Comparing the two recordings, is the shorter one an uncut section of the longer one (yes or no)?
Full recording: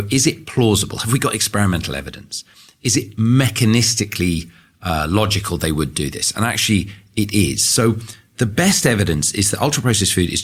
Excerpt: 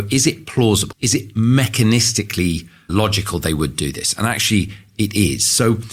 no